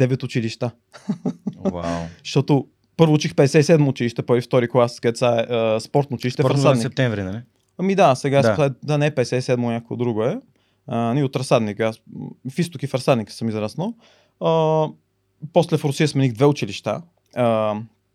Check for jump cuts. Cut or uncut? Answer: cut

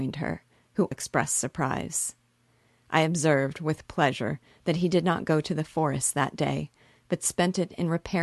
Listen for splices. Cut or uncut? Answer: cut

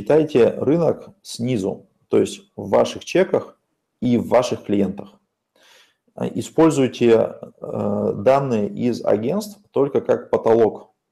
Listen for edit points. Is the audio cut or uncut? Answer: uncut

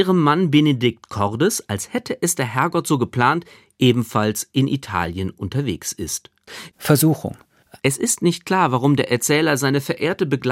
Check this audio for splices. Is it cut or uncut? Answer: cut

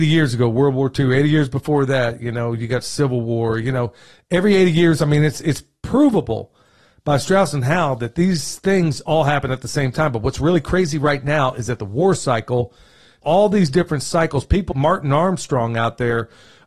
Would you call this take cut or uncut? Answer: cut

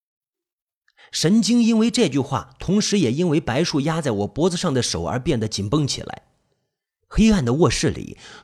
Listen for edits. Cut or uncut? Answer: uncut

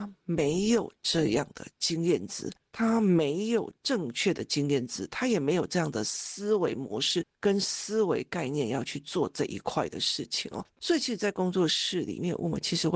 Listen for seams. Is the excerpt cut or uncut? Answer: uncut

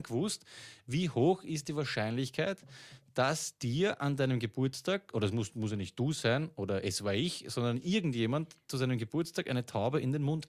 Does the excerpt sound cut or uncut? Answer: uncut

